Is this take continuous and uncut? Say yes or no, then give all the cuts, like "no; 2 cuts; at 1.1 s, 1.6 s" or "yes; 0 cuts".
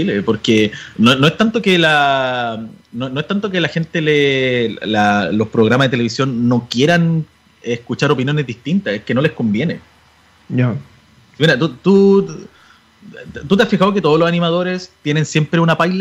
yes; 0 cuts